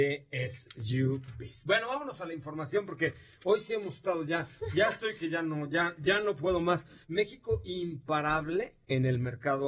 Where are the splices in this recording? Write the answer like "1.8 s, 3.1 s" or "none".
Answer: 7.0 s

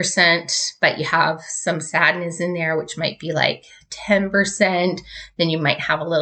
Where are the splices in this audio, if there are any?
none

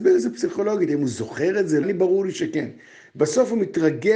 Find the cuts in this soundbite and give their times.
1.8 s

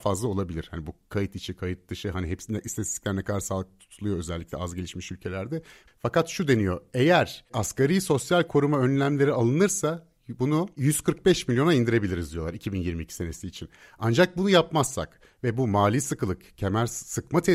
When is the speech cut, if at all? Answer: 5.9 s

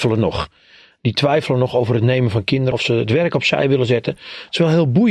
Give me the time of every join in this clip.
2.7 s

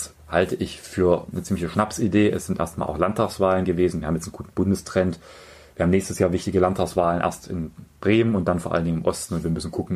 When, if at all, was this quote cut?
none

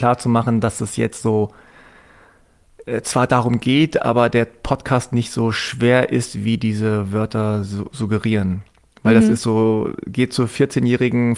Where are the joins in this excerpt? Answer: none

